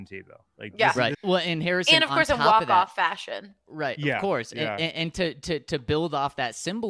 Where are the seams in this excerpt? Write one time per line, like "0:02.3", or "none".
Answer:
0:01.1